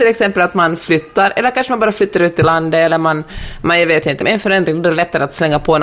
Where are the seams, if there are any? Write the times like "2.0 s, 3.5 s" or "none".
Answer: 4.2 s

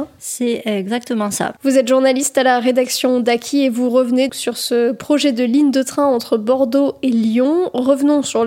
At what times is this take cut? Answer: 1.6 s, 4.3 s

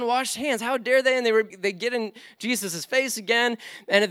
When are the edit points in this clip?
1.5 s

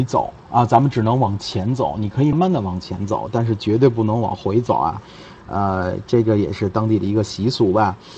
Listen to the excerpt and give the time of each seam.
2.3 s

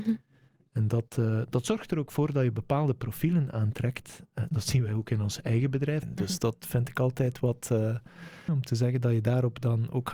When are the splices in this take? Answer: 6.0 s, 8.5 s

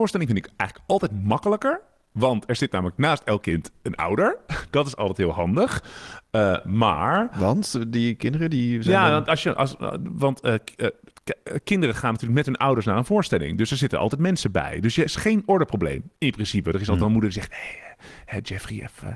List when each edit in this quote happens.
15.1 s

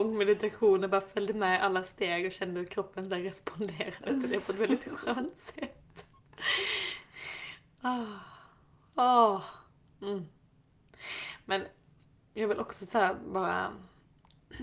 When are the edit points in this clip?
none

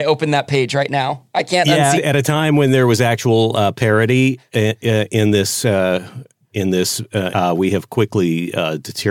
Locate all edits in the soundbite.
2.0 s, 7.3 s

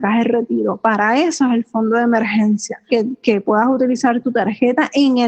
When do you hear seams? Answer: 2.9 s

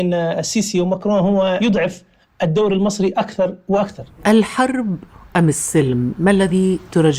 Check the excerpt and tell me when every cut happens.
none

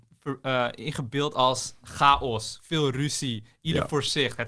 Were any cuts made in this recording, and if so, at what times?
1.8 s

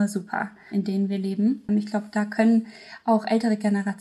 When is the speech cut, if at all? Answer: 1.7 s

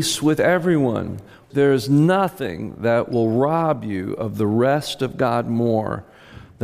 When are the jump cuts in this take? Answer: 1.4 s

